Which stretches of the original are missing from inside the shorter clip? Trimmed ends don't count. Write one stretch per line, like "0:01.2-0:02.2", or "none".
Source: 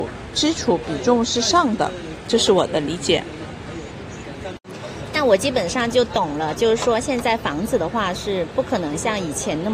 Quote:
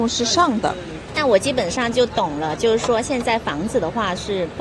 0:02.2-0:05.1